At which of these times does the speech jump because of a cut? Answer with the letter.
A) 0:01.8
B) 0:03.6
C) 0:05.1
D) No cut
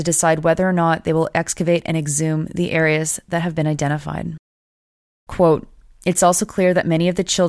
C